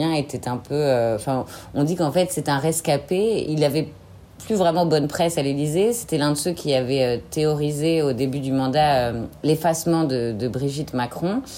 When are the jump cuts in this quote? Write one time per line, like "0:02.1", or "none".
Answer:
none